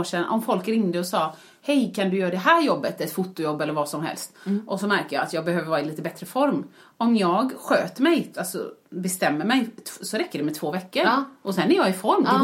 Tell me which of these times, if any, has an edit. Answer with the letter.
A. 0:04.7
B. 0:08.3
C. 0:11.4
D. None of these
B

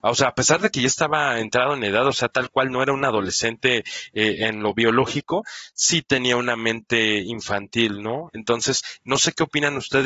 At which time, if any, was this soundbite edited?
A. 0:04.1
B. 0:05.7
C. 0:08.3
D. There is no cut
C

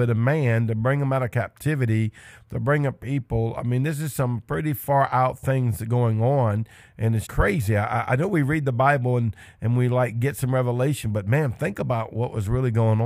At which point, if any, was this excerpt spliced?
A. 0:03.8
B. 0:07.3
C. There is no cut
B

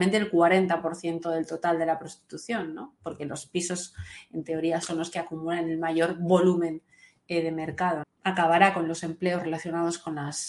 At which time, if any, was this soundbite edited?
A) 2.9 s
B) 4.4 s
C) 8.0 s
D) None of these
C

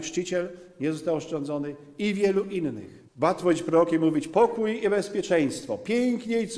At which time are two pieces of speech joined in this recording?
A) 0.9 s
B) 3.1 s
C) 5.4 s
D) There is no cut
B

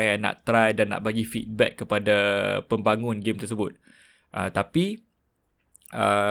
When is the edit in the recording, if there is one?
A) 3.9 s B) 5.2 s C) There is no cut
C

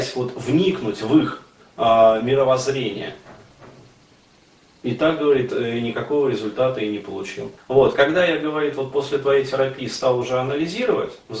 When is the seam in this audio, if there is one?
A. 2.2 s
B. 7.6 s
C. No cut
B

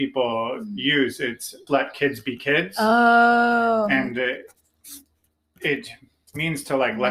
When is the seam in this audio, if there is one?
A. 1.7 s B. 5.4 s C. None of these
A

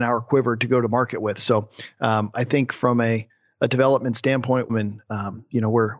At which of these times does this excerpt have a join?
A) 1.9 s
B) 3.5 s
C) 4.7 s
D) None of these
C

